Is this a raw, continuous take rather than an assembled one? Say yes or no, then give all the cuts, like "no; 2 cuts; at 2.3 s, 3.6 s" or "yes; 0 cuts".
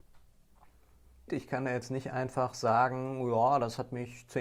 no; 1 cut; at 1.3 s